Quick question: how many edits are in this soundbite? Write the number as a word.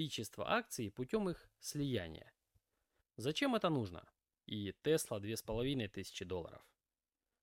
two